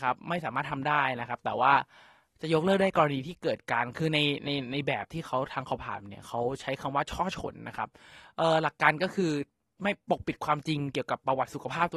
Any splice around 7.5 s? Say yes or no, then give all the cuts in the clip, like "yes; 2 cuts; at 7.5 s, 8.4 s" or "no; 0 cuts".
no; 1 cut; at 5.8 s